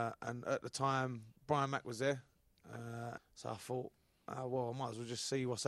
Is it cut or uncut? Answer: cut